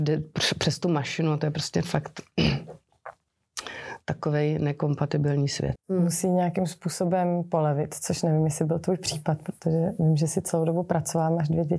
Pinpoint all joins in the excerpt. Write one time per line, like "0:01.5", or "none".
0:05.8